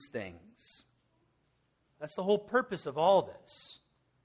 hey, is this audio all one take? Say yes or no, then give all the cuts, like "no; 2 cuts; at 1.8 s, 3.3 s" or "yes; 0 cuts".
no; 1 cut; at 1.9 s